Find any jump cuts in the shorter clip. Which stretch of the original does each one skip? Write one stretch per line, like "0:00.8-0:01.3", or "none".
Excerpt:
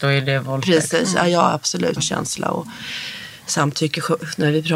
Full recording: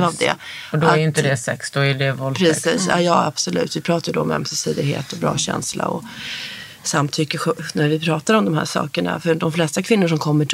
0:03.7-0:05.3